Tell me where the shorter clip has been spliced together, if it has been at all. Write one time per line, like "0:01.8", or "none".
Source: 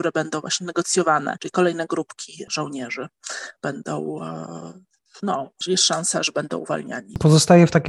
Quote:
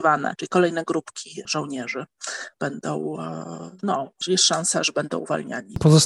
0:03.8